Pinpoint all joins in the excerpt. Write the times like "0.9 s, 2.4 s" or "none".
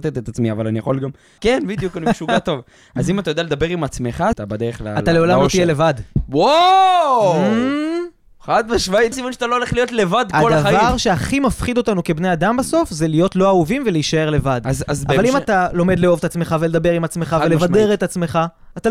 1.4 s, 4.3 s, 9.1 s

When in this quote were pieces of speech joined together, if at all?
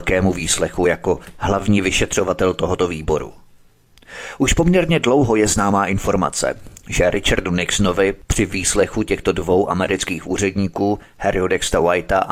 none

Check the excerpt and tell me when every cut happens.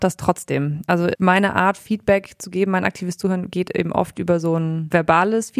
none

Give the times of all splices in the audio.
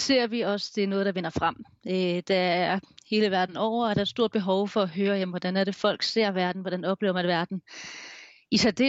none

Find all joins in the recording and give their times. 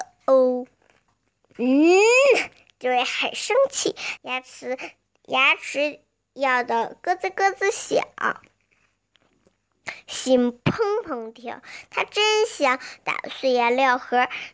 4.2 s

